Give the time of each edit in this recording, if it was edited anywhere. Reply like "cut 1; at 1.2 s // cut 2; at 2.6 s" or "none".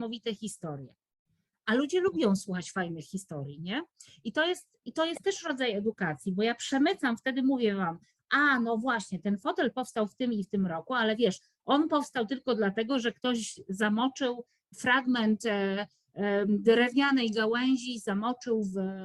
none